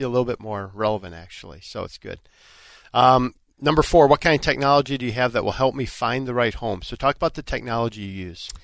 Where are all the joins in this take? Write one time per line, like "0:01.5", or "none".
none